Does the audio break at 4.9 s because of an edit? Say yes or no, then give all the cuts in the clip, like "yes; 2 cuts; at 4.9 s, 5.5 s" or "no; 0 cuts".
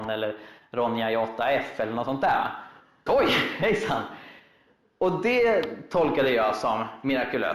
no; 1 cut; at 3.1 s